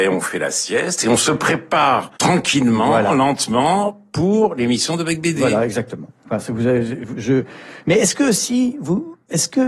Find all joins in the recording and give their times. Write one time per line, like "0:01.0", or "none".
0:02.2
0:07.2

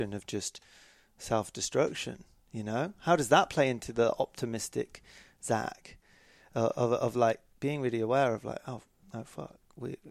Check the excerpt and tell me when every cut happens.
none

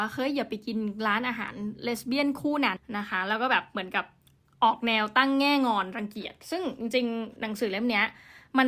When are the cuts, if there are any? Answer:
0:02.8

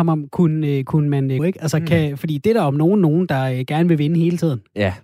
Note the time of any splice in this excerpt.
0:01.4

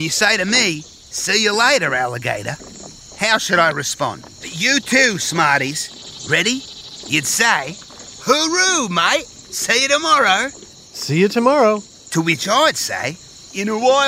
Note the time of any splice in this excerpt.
0:04.4
0:10.7

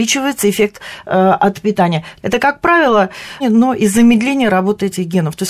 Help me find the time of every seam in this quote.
0:02.2
0:03.4

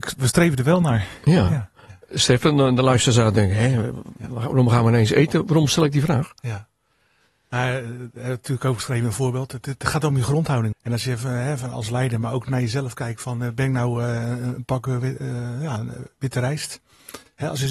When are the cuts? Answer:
0:10.7

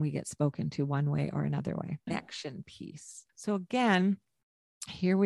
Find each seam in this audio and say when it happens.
0:02.1
0:03.3

